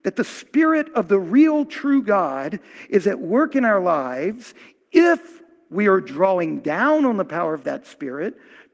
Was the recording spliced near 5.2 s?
no; 0 cuts

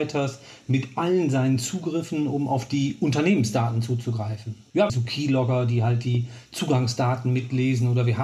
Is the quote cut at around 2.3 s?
no; 1 cut; at 4.9 s

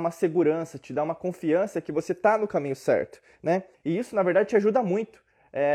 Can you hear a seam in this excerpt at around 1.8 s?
no; 1 cut; at 3.7 s

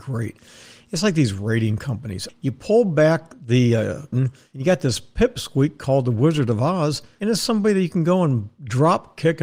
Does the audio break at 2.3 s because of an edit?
yes; 2 cuts; at 2.3 s, 4.1 s

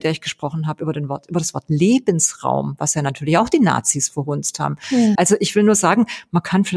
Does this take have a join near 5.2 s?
yes; 1 cut; at 5.2 s

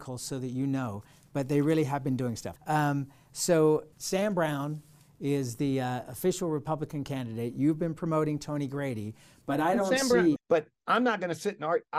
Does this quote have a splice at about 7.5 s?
no; 3 cuts; at 2.6 s, 3.9 s, 10.4 s

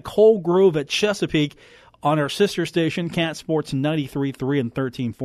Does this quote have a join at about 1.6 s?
no; 0 cuts

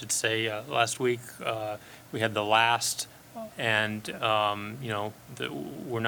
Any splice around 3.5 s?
yes; 1 cut; at 3.5 s

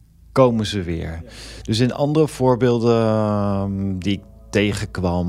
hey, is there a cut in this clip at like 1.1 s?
no; 0 cuts

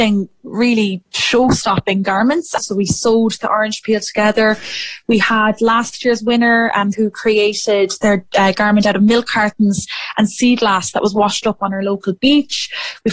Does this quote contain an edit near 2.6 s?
yes; 2 cuts; at 2.6 s, 6.9 s

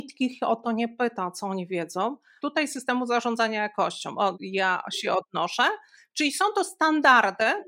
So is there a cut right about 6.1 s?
no; 2 cuts; at 2.4 s, 4.3 s

